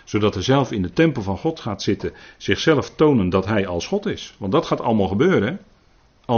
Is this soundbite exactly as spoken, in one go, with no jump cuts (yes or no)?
yes